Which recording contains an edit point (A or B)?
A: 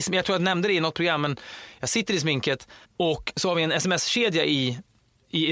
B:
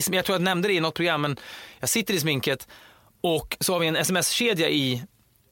A